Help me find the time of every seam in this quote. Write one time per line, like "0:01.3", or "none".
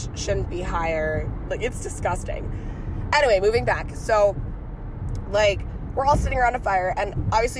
0:01.5

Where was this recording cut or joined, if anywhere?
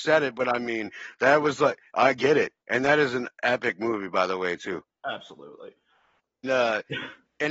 0:06.4

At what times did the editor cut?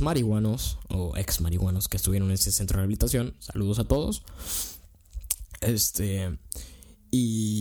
none

